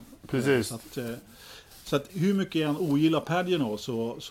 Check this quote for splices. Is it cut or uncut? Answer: cut